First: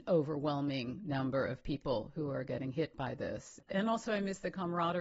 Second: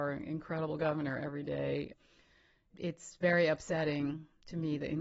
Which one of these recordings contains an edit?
first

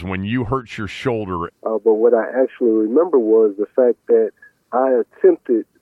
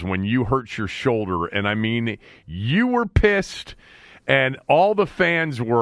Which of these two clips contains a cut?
first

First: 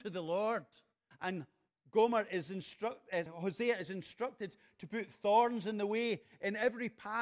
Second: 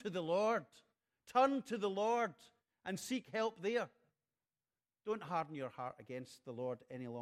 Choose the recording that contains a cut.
first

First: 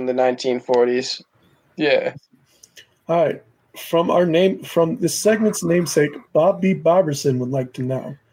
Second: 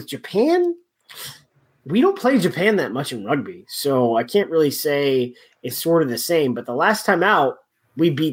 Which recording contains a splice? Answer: first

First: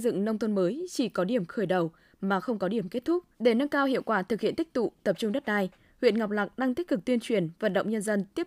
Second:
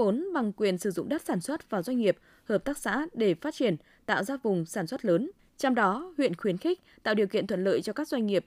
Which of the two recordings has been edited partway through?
first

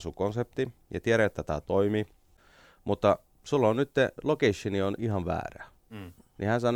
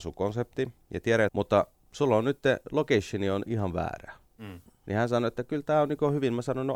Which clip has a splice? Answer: second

